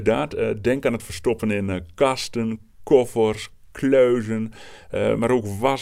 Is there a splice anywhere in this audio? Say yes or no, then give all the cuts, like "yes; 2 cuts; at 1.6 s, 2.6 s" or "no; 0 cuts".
no; 0 cuts